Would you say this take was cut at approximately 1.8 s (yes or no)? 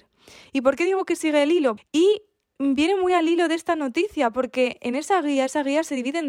yes